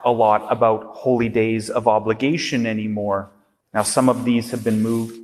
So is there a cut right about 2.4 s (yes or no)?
no